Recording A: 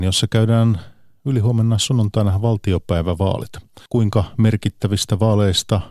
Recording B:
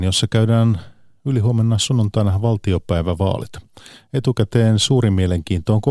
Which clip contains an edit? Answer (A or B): A